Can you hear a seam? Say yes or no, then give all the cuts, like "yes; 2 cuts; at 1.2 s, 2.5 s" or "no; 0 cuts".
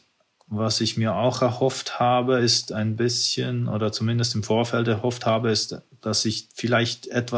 no; 0 cuts